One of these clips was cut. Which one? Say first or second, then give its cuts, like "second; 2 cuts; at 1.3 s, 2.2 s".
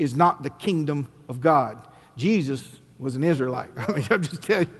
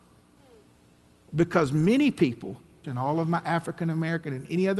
second; 2 cuts; at 1.2 s, 2.8 s